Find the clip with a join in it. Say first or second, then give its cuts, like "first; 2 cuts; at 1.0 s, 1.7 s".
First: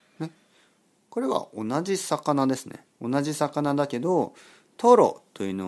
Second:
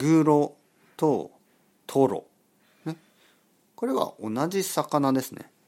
first; 1 cut; at 2.9 s